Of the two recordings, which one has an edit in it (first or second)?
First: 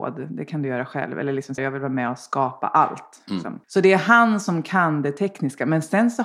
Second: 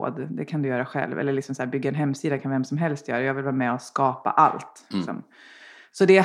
first